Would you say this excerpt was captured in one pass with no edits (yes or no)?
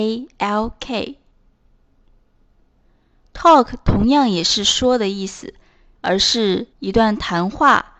no